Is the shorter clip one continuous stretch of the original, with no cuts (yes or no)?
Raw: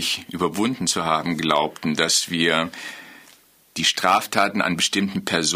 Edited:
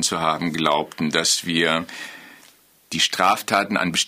yes